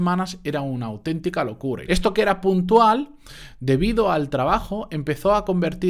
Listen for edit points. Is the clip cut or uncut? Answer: cut